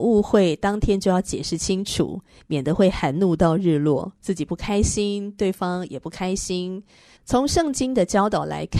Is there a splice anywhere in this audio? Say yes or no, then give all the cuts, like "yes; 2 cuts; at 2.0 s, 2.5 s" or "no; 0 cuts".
yes; 1 cut; at 7.2 s